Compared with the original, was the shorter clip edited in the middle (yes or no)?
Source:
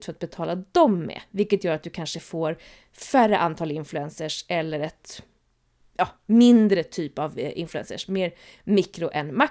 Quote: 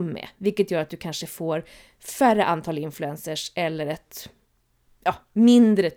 no